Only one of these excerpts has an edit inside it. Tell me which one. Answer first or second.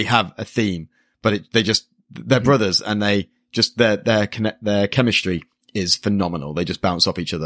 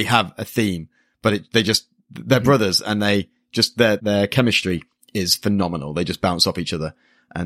second